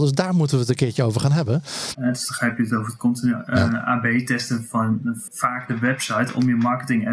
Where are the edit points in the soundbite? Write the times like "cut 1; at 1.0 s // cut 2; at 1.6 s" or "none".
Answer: cut 1; at 1.9 s // cut 2; at 5.3 s